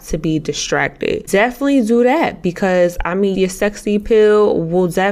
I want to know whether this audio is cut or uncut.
cut